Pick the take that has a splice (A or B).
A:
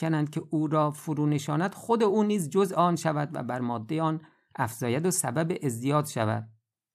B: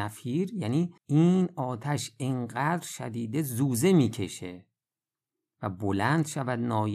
B